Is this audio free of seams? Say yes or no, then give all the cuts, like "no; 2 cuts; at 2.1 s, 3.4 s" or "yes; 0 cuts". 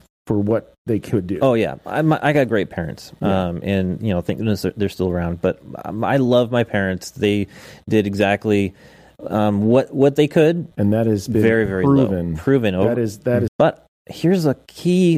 no; 2 cuts; at 10.7 s, 13.5 s